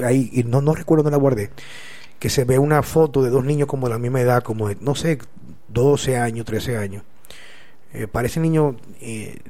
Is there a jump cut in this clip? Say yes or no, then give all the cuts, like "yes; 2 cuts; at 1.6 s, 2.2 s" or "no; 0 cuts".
no; 0 cuts